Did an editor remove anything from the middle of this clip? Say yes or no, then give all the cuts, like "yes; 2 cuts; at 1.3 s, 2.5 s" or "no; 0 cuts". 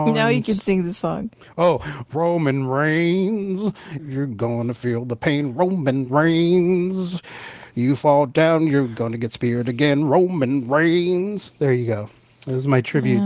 yes; 1 cut; at 4.0 s